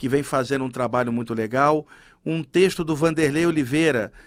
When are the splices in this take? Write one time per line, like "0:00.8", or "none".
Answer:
none